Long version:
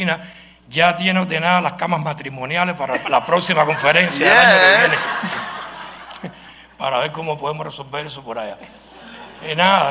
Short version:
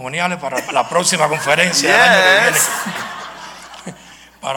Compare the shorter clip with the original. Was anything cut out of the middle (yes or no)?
no